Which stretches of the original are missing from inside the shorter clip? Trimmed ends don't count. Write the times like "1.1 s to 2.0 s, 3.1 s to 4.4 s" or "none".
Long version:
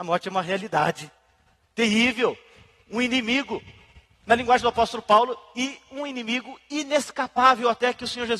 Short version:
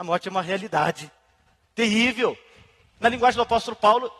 2.8 s to 4.1 s